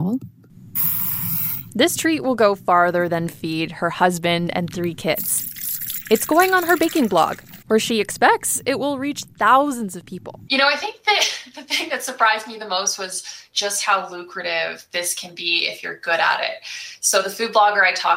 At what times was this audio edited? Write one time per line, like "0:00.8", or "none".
0:07.6
0:10.5